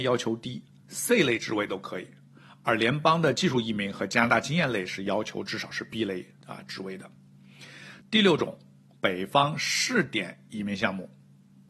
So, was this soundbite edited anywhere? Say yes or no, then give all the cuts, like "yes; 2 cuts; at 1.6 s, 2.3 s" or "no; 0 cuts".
yes; 1 cut; at 8.0 s